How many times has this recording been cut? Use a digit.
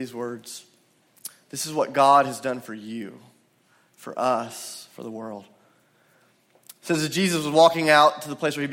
0